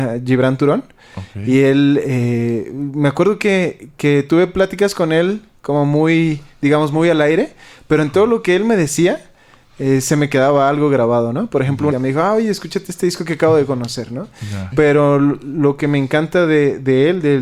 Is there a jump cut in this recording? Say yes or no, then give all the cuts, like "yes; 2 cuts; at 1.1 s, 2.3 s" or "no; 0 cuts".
yes; 2 cuts; at 11.9 s, 14.7 s